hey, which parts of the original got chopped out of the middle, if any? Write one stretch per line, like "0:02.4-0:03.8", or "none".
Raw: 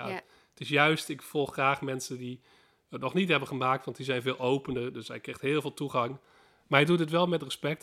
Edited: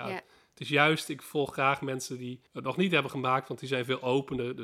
0:02.5-0:02.8